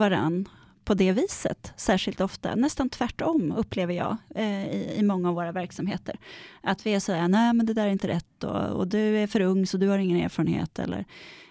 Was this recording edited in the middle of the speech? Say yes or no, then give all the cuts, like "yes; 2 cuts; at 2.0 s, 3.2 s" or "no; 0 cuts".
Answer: no; 0 cuts